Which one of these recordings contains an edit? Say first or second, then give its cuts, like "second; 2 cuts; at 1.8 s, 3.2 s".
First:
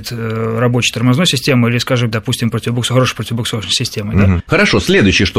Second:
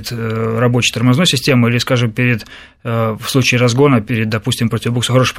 first; 2 cuts; at 2.1 s, 4.4 s